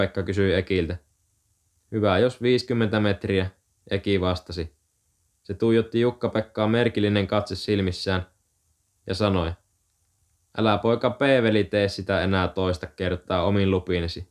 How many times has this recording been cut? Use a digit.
0